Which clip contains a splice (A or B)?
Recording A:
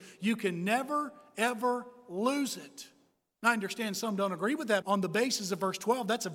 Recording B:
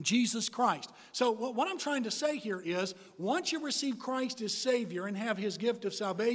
A